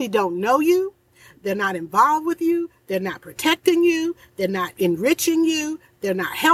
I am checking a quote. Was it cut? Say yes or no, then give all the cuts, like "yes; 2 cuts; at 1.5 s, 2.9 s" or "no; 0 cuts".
no; 0 cuts